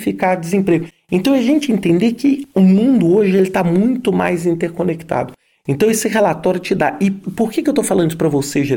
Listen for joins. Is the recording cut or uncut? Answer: uncut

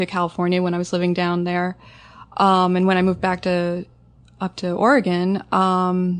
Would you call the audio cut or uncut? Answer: uncut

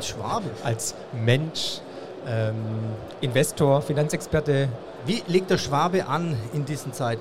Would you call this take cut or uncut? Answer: uncut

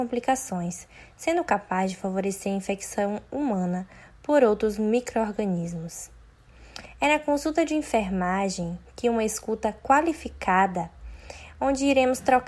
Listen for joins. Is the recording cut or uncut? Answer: uncut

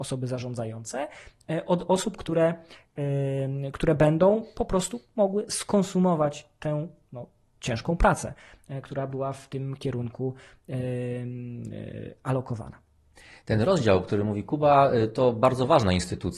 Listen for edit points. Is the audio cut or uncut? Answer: uncut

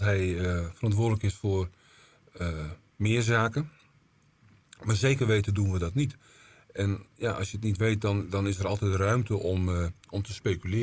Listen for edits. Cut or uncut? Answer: uncut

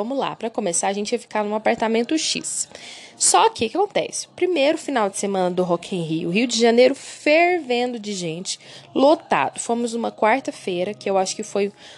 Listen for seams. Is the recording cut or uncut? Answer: uncut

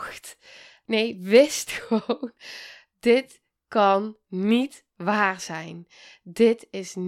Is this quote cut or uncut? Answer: uncut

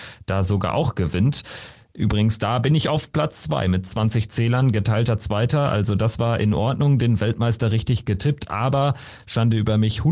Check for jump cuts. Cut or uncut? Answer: uncut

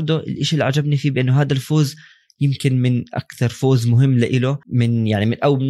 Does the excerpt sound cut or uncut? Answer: cut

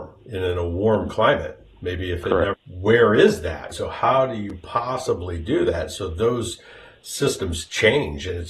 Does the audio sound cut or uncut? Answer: cut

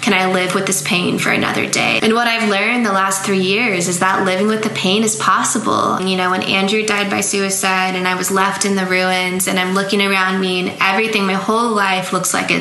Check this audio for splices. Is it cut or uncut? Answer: cut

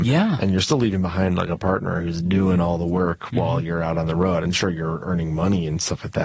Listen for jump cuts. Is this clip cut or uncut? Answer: uncut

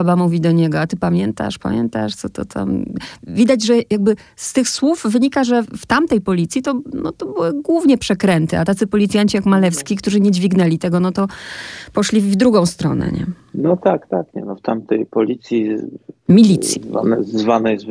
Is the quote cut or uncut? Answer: uncut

